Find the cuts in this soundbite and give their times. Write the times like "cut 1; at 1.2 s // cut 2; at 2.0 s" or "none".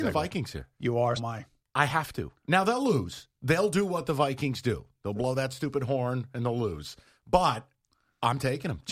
cut 1; at 1.2 s